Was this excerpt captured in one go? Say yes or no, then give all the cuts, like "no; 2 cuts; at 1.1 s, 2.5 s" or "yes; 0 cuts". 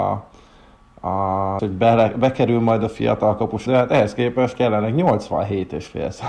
no; 2 cuts; at 1.6 s, 3.7 s